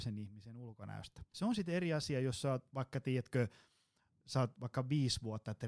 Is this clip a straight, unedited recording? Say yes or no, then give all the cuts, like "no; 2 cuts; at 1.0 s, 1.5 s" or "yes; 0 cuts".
no; 1 cut; at 1.3 s